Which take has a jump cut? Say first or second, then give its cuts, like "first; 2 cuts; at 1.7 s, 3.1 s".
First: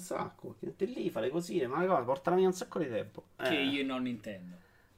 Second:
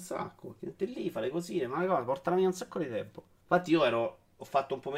first; 1 cut; at 3.4 s